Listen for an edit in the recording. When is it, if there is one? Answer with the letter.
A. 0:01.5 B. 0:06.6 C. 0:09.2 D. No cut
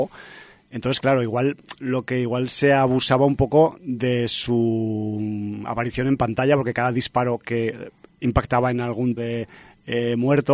C